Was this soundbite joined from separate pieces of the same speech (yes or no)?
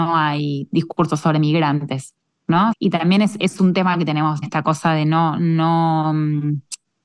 yes